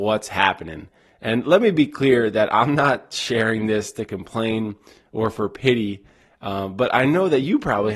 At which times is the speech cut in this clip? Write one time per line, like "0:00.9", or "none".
none